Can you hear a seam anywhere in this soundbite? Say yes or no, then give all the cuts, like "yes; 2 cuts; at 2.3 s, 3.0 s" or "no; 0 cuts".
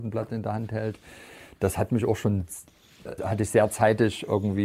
yes; 1 cut; at 3.2 s